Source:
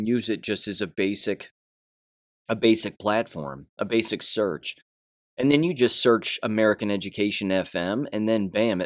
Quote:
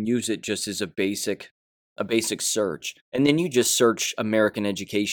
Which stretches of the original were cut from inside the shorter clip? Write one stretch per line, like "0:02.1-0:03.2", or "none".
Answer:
0:01.9-0:03.7
0:04.8-0:05.3